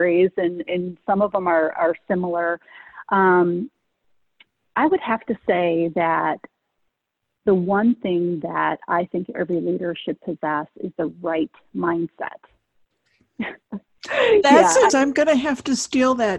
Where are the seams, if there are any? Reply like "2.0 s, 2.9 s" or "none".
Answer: 12.9 s, 14.9 s